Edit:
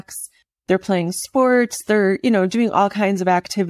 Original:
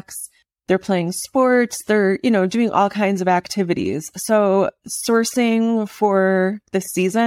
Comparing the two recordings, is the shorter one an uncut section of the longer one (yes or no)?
yes